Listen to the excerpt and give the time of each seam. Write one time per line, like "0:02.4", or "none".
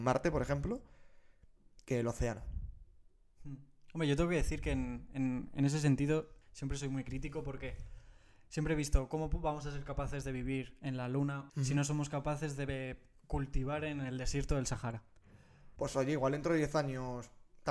0:06.4
0:11.5
0:15.8